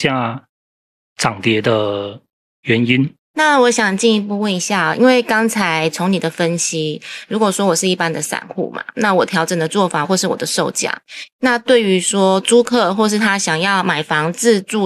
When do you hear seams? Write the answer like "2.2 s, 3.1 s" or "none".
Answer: 10.0 s

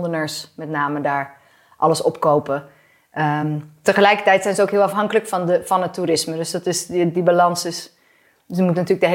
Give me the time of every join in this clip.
none

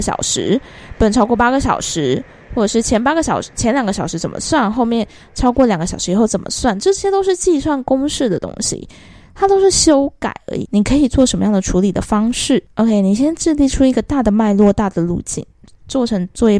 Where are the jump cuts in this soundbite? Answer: 10.7 s

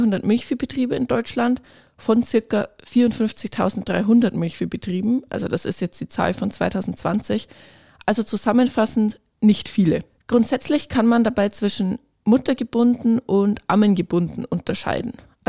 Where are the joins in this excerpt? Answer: none

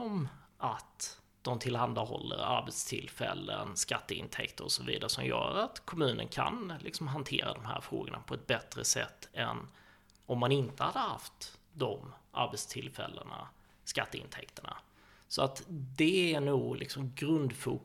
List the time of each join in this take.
none

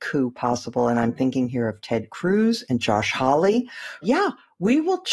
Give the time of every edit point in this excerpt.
4.0 s

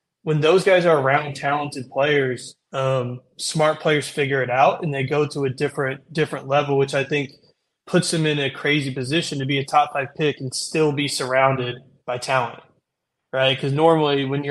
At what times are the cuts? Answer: none

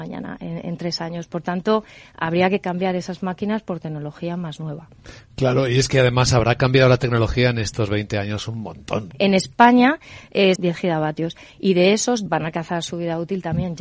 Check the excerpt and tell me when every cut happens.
9.1 s, 10.6 s, 12.3 s

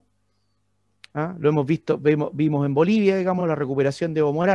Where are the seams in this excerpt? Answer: none

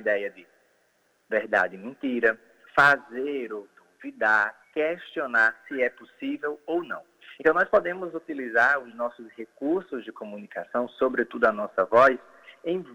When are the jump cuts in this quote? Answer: 2.7 s, 4.6 s, 7.4 s

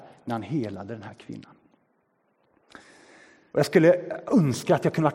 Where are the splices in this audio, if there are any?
3.5 s

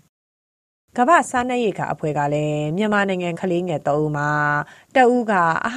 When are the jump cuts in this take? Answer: 3.3 s

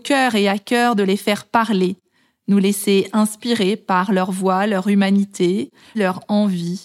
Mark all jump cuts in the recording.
5.9 s

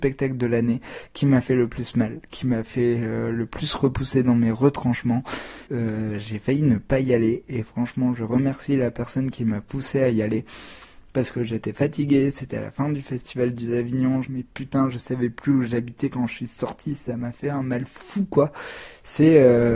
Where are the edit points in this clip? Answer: 5.7 s, 14.2 s

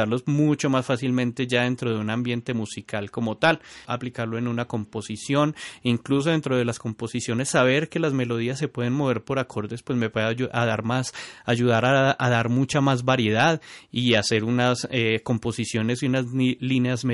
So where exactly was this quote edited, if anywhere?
3.8 s

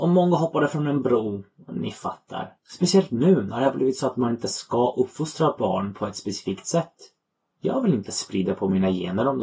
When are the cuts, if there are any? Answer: 2.6 s, 7.5 s

